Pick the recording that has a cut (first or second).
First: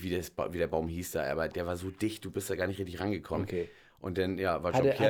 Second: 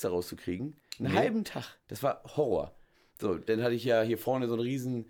second